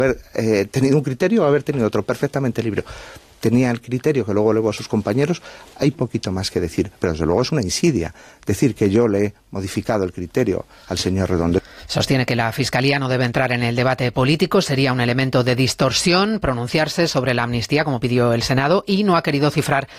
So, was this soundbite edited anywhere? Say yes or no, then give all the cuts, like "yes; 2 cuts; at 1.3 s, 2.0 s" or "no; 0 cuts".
yes; 1 cut; at 5.9 s